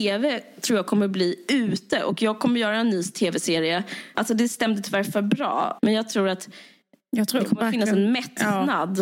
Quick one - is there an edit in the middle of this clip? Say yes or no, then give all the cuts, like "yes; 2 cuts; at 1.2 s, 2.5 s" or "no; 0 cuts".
yes; 2 cuts; at 4.1 s, 5.8 s